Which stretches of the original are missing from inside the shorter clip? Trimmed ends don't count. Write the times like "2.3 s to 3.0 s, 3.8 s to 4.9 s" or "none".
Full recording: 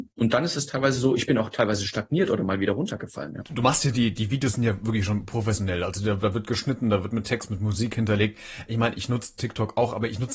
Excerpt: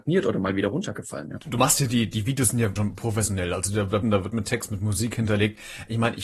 4.8 s to 5.1 s, 6.3 s to 6.8 s